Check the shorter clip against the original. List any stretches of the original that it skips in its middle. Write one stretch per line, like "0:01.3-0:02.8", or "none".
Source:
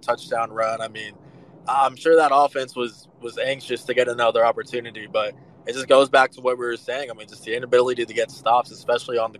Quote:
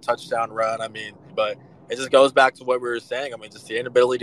0:01.3-0:05.1